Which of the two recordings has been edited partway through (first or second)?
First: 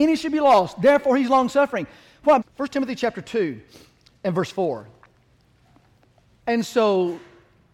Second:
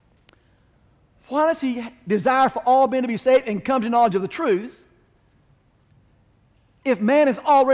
first